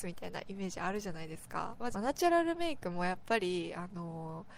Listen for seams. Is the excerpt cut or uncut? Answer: cut